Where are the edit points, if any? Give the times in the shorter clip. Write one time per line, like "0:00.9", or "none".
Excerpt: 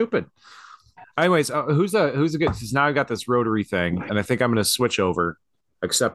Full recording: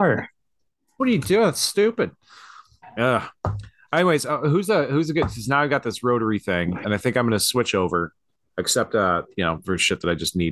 0:01.0

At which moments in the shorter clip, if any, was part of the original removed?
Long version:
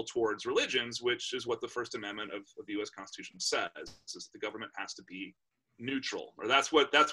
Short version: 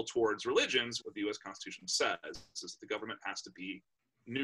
0:01.0

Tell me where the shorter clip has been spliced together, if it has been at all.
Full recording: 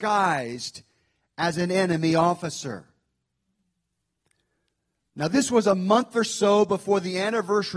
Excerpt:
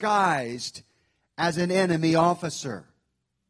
none

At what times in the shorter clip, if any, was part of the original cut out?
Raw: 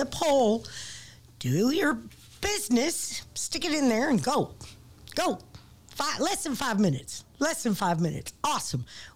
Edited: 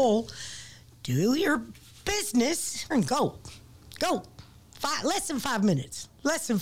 0:02.9

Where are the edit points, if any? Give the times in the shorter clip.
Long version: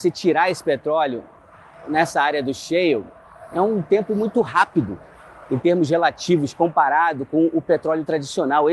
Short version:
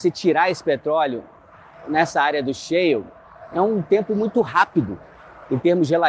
none

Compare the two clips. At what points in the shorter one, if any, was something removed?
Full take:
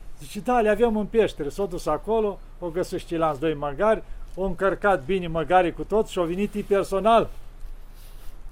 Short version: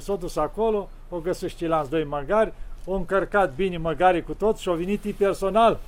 none

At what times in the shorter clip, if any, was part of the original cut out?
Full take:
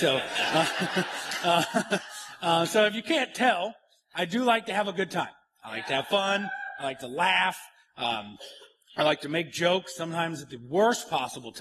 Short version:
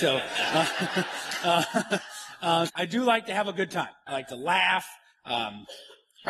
0:02.7
0:04.1

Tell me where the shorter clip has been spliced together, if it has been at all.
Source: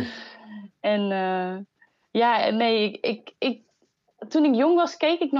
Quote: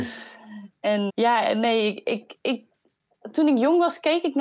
0:01.1

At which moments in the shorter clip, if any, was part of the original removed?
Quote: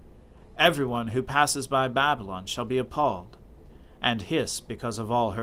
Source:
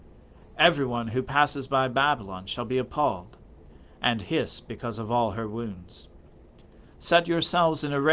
none

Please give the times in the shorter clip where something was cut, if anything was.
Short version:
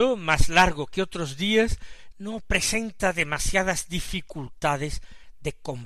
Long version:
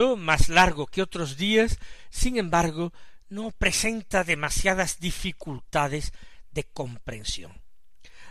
0:02.1

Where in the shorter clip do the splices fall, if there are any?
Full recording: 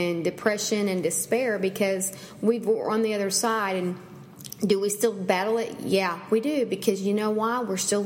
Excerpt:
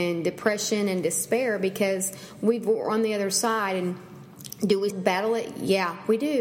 0:04.9

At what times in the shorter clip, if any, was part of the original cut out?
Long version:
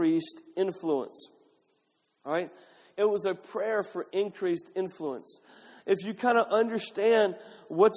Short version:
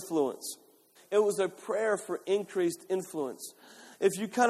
0:01.0

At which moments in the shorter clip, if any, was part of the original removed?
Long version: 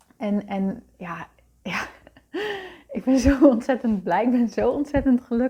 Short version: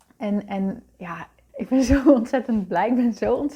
0:01.5

